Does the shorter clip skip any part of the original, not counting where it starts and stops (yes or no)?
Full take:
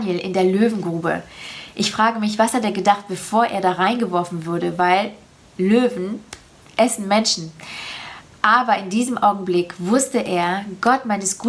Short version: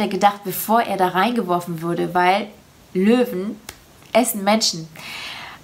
no